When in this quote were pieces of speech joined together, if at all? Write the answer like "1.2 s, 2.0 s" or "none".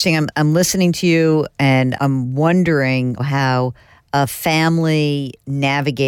2.0 s, 3.2 s